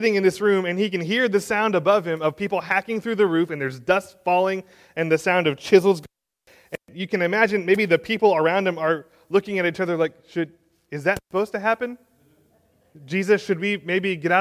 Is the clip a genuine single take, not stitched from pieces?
yes; 0 cuts

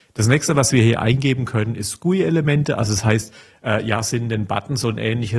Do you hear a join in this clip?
no; 0 cuts

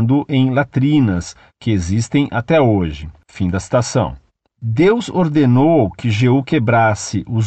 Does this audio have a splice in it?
no; 0 cuts

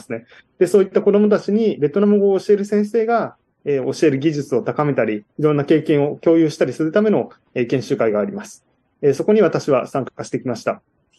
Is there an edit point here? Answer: no; 0 cuts

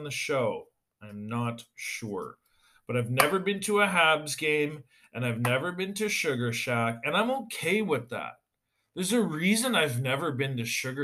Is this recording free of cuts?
yes; 0 cuts

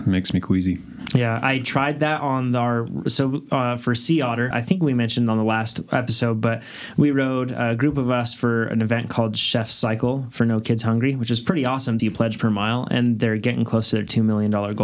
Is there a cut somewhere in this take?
yes; 2 cuts; at 4.5 s, 12.0 s

